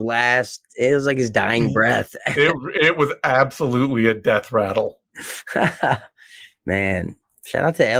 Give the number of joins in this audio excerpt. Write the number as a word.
zero